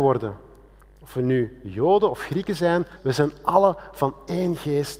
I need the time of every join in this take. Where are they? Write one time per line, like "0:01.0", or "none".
0:03.0

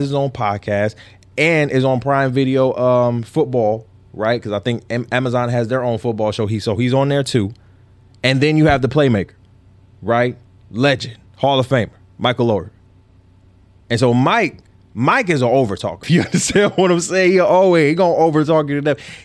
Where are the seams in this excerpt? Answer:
0:16.0

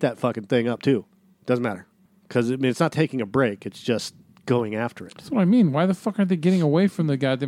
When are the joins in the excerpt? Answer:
none

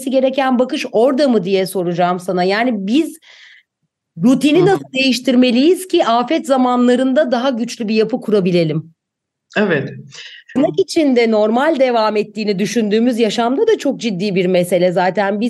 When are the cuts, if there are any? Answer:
0:10.6

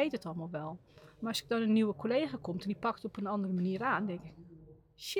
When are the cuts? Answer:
none

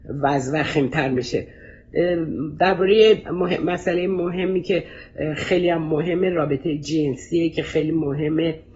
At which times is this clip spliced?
0:03.2

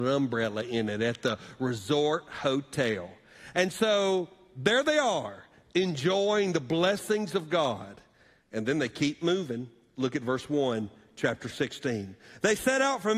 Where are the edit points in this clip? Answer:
none

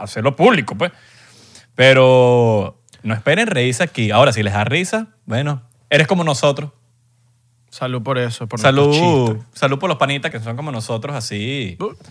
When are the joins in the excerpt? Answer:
0:10.3

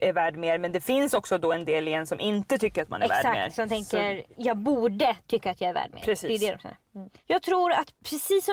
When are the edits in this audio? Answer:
none

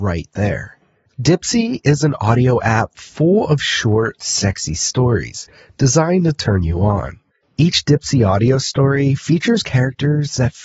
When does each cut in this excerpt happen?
0:01.1

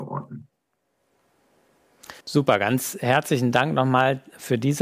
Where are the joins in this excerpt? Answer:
0:02.2

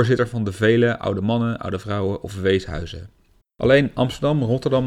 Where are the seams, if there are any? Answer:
0:03.4

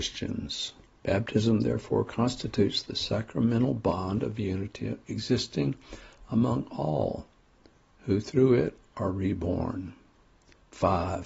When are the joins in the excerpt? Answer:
0:01.0

